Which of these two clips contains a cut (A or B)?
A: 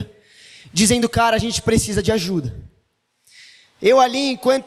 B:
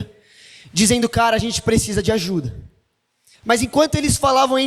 B